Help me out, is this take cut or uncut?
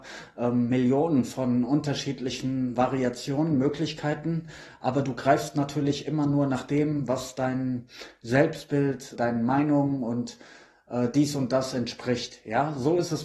cut